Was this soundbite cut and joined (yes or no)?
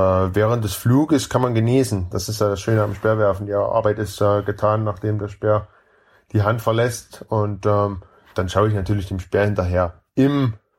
no